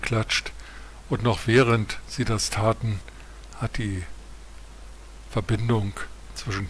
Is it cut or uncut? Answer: cut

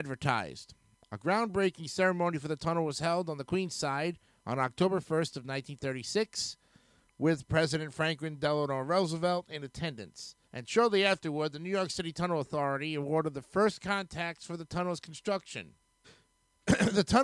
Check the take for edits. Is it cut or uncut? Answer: cut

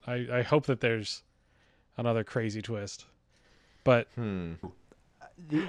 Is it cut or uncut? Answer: cut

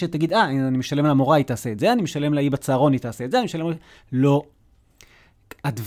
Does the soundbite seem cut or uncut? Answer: uncut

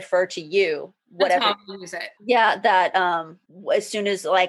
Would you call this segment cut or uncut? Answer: cut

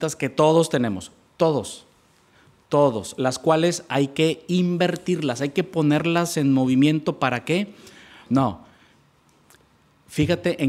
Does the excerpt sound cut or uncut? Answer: cut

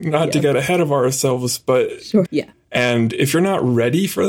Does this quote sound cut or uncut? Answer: cut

